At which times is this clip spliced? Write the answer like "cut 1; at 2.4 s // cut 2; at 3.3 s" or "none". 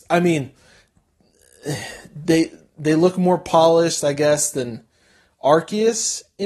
none